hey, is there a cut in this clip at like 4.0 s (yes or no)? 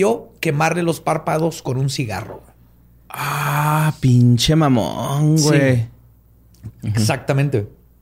no